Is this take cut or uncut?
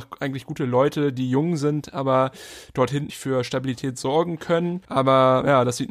cut